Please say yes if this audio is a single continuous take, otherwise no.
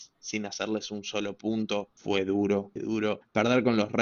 no